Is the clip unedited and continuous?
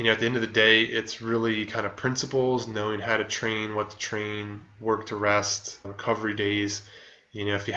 no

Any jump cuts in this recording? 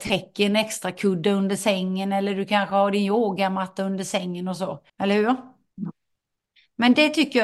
yes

